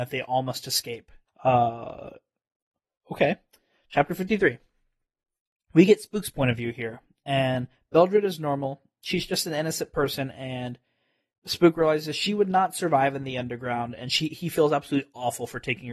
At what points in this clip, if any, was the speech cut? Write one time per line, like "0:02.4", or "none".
0:01.3